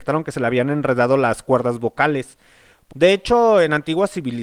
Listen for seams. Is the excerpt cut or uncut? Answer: cut